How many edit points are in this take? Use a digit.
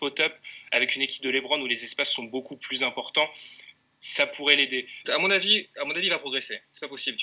1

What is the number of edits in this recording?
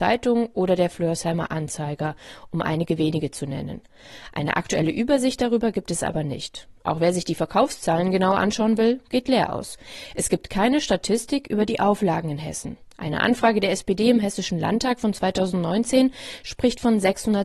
0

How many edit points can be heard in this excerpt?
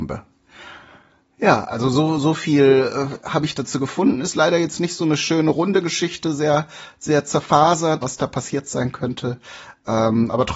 1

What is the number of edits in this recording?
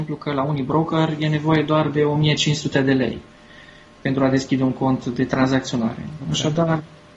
0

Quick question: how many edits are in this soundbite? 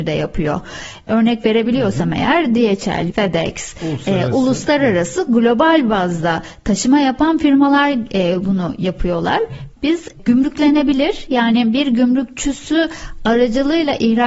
2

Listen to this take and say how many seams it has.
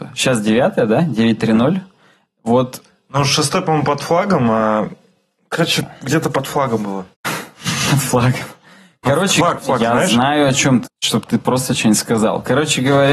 3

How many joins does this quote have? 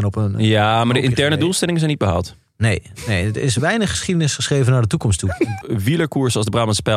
1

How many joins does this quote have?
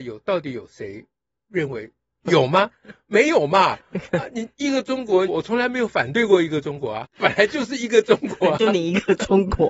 3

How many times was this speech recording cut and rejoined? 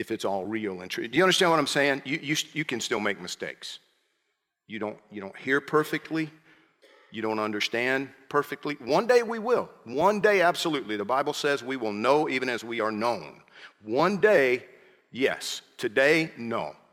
0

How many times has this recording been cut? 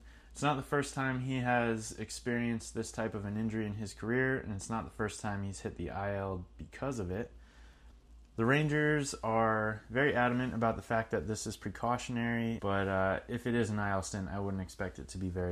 1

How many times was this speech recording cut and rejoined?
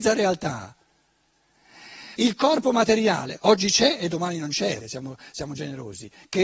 2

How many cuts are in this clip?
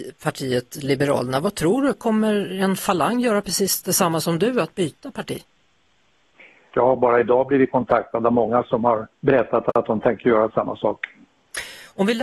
2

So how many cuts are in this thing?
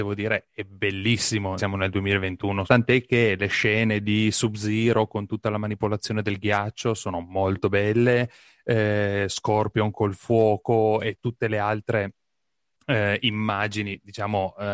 2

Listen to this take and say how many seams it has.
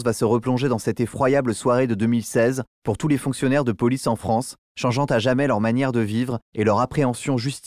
1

